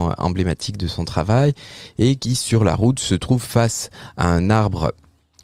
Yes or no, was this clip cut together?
no